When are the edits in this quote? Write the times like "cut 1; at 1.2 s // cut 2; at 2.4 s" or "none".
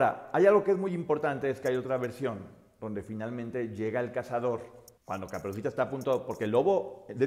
cut 1; at 5.0 s